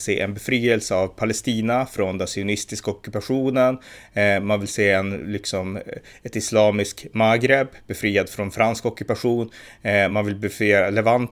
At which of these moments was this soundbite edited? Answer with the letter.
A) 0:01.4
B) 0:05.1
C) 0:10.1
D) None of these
D